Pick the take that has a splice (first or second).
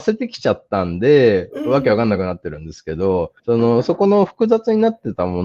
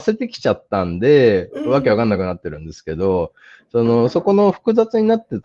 first